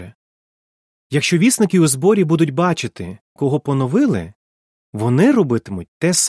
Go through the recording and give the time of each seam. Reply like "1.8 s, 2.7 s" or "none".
3.4 s